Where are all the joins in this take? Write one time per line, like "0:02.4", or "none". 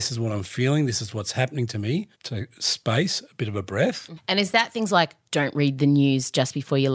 0:02.1
0:04.2